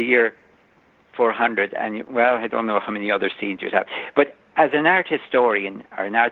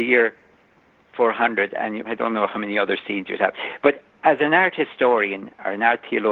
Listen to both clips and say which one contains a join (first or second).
second